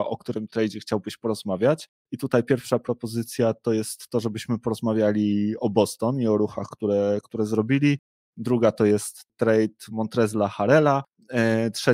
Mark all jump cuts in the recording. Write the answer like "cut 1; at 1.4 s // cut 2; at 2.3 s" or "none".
none